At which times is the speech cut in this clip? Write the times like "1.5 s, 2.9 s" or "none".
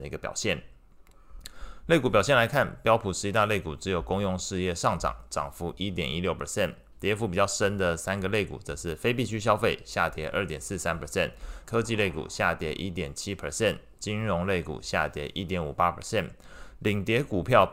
11.6 s